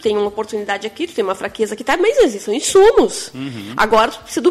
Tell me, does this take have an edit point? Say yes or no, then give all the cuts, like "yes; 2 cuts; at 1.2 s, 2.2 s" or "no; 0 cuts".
no; 0 cuts